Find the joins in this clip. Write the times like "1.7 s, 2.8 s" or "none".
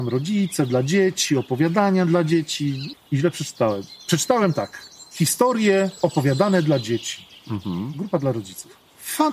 2.9 s